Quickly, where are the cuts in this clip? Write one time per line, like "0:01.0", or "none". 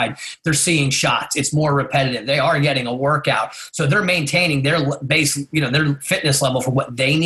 none